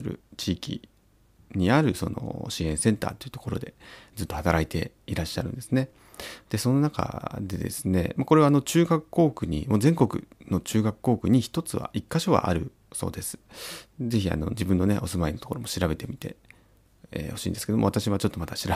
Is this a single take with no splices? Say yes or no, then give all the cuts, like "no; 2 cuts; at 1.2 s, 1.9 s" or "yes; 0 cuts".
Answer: yes; 0 cuts